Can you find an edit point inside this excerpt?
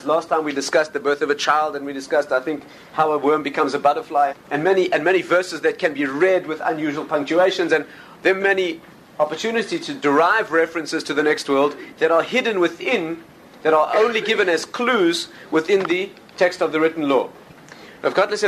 yes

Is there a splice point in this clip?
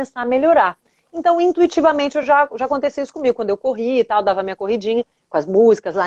no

